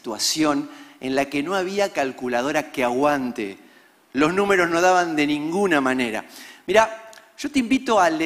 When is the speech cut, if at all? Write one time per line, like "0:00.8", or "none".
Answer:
none